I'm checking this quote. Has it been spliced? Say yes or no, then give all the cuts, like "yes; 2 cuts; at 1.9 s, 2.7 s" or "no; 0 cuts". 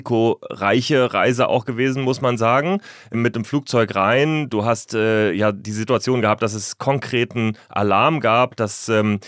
no; 0 cuts